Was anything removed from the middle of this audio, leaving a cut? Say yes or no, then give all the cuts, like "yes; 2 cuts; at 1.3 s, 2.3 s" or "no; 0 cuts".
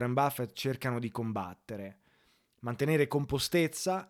no; 0 cuts